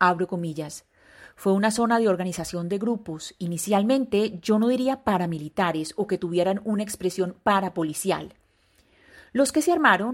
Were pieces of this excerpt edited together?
no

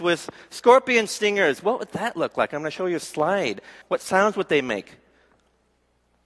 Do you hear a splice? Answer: yes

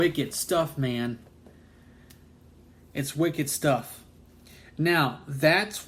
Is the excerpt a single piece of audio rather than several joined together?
yes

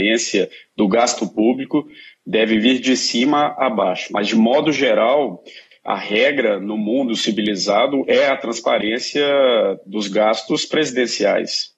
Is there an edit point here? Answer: no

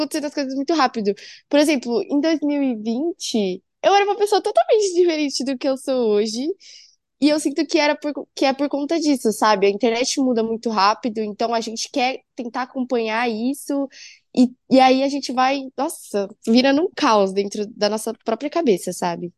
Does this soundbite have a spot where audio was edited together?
no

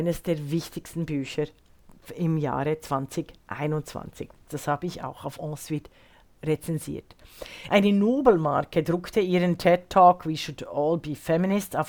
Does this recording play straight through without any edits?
no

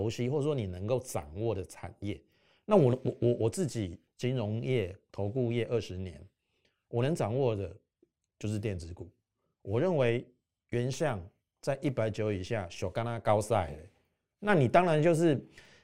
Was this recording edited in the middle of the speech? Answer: yes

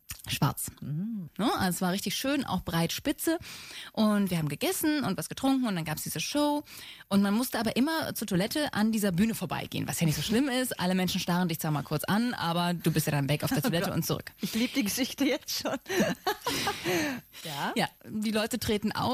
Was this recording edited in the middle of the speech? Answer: yes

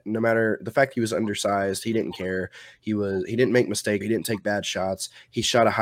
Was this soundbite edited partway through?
yes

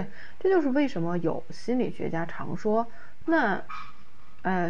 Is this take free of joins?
no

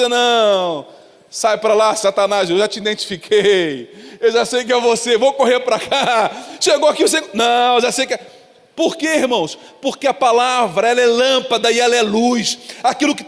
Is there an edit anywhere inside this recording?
no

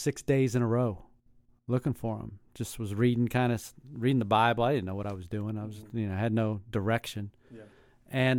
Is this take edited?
no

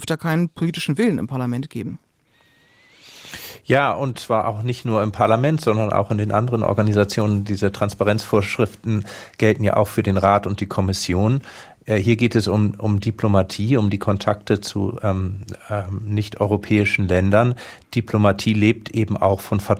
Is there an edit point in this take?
no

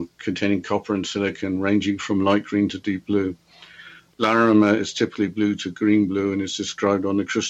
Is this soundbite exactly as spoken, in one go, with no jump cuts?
yes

